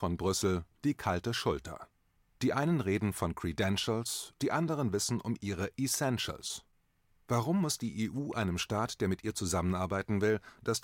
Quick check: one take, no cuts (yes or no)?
yes